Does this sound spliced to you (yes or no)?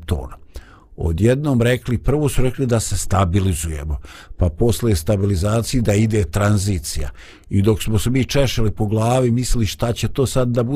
no